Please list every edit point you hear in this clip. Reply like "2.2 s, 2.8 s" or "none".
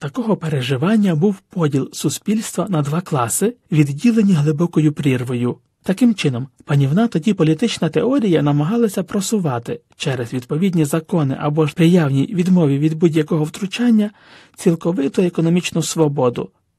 5.7 s, 11.7 s